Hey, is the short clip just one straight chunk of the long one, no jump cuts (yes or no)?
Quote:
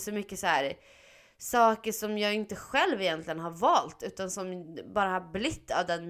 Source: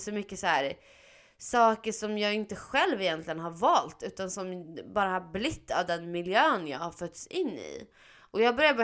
yes